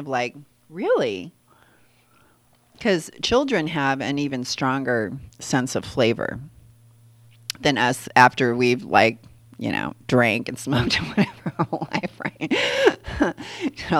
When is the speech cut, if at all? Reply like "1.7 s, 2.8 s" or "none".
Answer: none